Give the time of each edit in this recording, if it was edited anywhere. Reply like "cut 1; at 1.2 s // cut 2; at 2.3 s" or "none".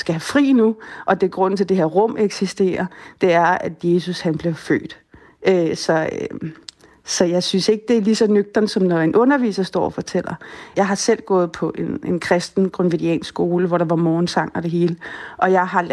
cut 1; at 10.7 s